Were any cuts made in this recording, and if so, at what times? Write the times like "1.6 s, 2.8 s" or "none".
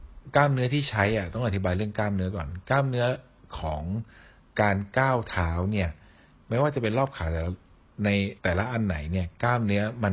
8.4 s